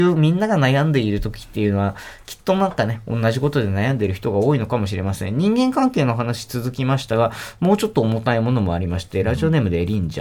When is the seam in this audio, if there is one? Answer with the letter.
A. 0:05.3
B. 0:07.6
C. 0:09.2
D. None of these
D